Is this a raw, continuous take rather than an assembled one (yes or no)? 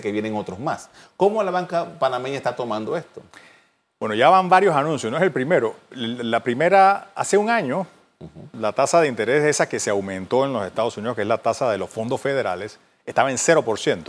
yes